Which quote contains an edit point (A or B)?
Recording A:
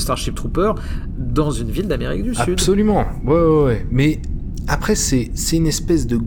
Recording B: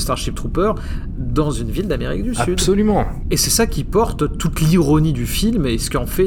B